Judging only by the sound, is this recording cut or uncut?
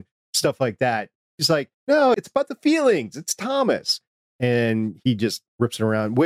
cut